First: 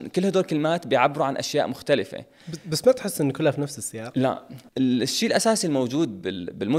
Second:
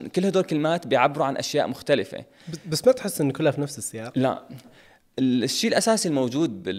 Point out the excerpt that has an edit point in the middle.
first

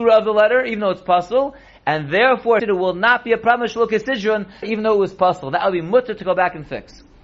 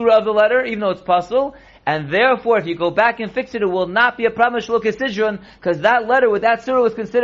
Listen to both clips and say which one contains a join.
first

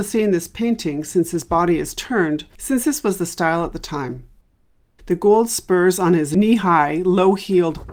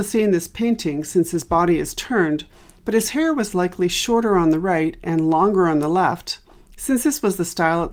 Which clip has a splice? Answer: first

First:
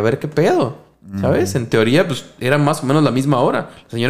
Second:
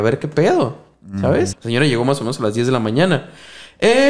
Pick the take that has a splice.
second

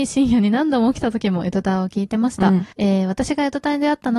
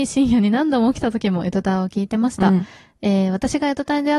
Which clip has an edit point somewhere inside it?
first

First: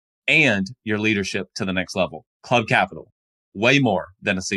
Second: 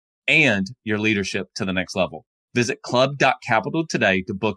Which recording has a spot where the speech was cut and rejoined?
first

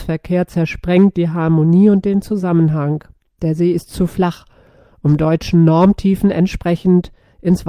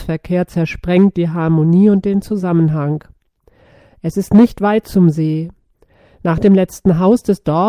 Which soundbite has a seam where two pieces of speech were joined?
first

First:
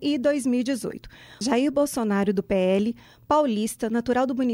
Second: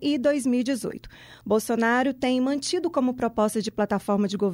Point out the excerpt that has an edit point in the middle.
first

